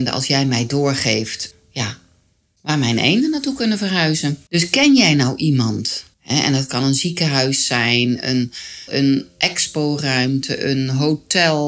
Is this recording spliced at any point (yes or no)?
yes